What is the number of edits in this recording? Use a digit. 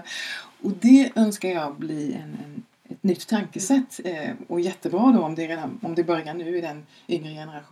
0